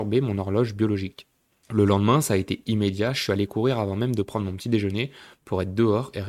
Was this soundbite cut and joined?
no; 0 cuts

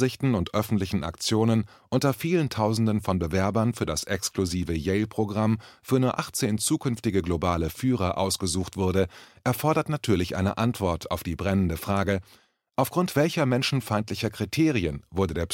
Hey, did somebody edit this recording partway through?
no; 0 cuts

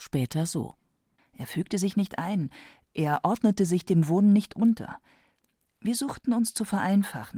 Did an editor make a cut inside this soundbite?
yes; 1 cut; at 1.2 s

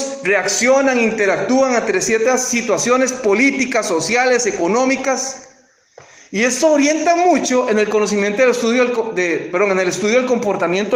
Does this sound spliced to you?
no; 0 cuts

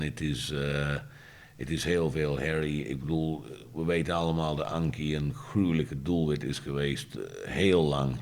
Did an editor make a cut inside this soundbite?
no; 0 cuts

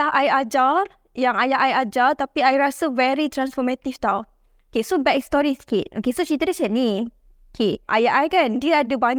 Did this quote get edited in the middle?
yes; 1 cut; at 7.9 s

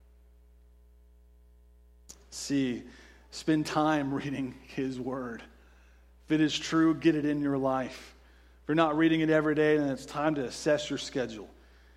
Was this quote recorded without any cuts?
yes; 0 cuts

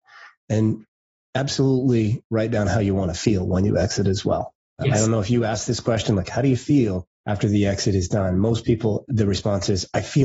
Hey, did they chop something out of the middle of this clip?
yes; 3 cuts; at 4.8 s, 7.1 s, 9.1 s

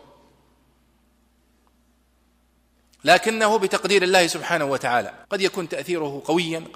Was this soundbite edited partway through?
yes; 1 cut; at 5.2 s

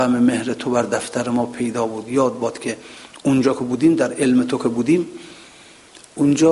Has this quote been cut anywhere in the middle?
no; 0 cuts

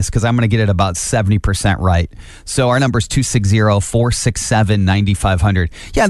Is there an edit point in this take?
no; 0 cuts

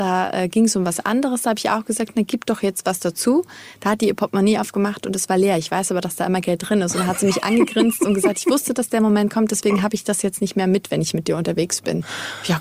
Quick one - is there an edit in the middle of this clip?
no; 0 cuts

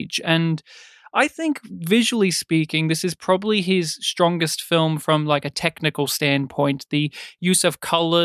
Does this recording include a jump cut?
no; 0 cuts

